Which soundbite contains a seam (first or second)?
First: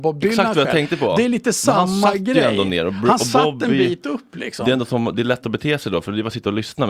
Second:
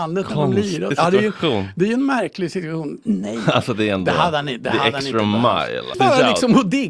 second